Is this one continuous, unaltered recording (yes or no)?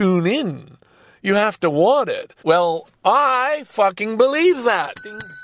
no